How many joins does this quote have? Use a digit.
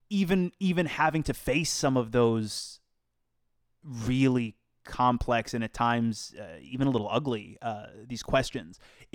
0